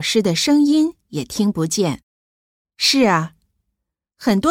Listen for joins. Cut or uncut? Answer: cut